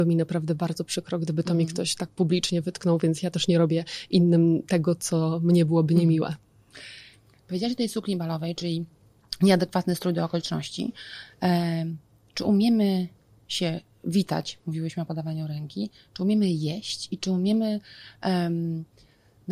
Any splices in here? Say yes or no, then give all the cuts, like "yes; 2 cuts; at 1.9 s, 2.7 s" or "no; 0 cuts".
no; 0 cuts